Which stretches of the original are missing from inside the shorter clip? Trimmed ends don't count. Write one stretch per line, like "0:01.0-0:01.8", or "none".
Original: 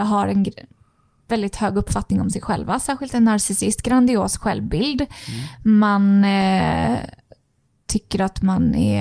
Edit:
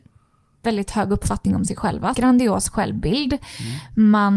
0:02.8-0:03.8